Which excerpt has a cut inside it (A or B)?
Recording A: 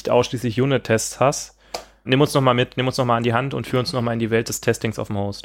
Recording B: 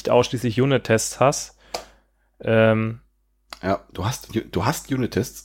A